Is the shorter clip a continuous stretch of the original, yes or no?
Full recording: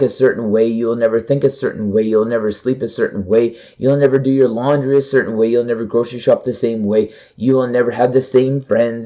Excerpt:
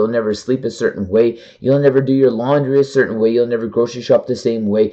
yes